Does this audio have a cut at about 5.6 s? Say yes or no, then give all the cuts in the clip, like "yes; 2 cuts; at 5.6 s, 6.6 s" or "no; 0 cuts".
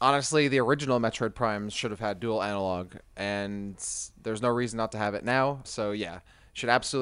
yes; 1 cut; at 5.6 s